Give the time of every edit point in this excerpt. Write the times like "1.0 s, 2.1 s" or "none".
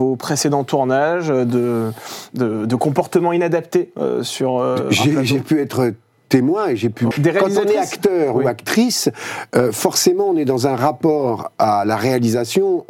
7.1 s